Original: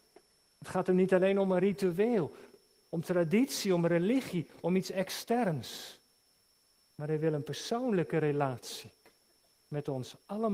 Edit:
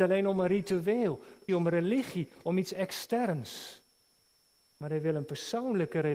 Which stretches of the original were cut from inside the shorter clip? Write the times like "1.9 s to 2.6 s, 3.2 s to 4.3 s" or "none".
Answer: 2.6 s to 3.7 s